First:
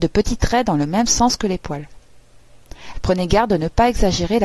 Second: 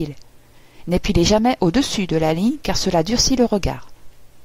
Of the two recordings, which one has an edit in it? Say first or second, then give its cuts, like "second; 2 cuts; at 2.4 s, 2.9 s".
first; 1 cut; at 2.9 s